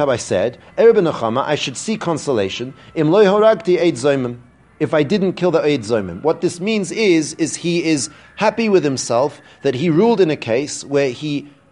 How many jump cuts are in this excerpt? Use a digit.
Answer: 0